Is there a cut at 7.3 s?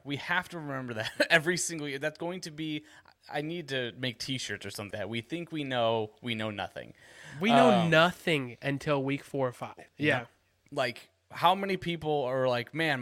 no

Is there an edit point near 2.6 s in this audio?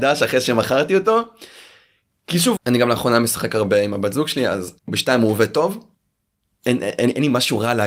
yes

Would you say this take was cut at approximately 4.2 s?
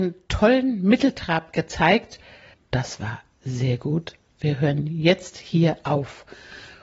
no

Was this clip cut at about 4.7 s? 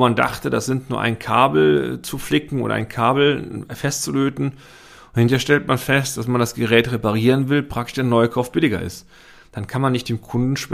no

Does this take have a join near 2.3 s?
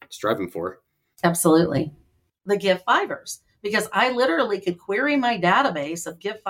yes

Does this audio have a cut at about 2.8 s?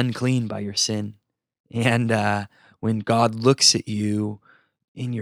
no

